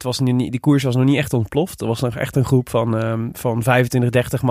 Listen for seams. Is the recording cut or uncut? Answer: uncut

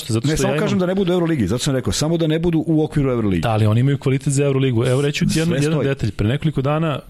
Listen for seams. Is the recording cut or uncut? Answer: uncut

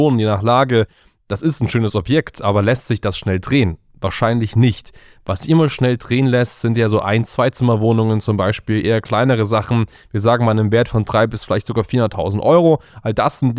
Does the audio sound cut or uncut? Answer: uncut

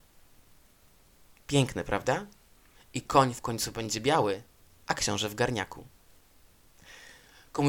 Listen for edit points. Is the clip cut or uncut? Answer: cut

